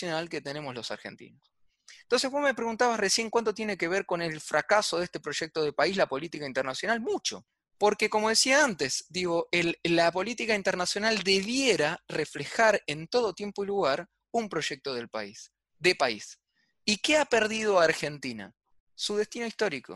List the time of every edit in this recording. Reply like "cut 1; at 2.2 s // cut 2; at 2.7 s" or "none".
none